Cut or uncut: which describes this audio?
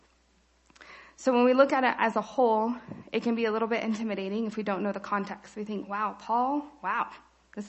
uncut